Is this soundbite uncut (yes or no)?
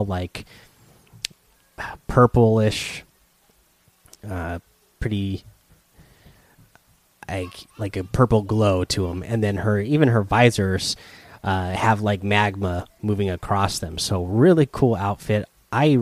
yes